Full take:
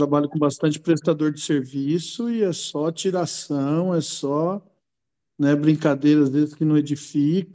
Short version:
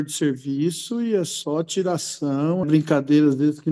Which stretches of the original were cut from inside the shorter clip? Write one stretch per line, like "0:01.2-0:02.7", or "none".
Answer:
0:03.9-0:05.6